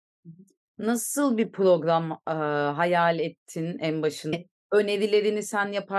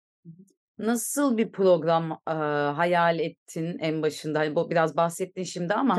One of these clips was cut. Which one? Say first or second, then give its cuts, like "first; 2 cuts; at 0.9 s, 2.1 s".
first; 1 cut; at 4.3 s